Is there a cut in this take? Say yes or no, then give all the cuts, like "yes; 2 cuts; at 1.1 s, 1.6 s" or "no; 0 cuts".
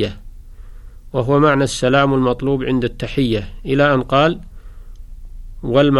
no; 0 cuts